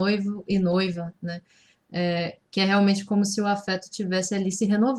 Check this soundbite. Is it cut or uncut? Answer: uncut